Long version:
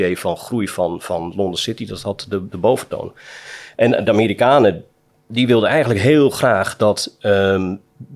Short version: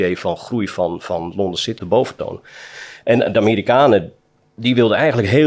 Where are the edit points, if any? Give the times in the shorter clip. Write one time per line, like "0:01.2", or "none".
0:01.8